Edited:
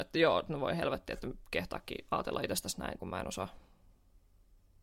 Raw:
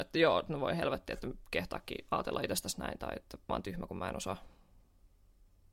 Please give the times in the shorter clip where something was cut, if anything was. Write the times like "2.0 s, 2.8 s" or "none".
3.0 s